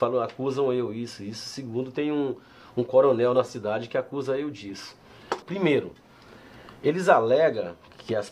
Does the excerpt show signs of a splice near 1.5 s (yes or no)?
no